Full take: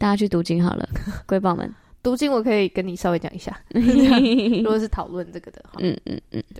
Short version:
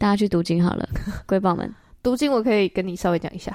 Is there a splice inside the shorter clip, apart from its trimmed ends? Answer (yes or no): no